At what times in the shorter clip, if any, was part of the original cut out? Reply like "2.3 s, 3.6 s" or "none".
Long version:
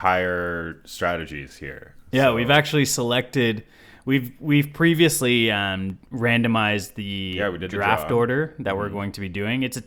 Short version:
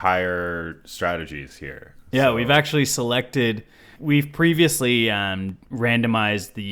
4.0 s